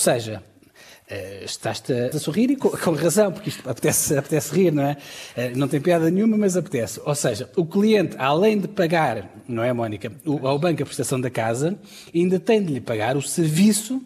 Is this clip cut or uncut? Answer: cut